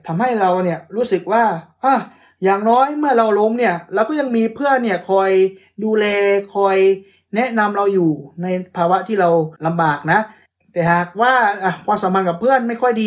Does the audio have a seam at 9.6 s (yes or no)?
yes